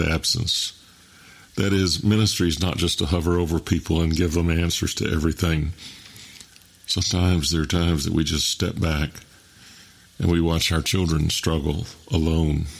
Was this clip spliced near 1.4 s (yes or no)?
no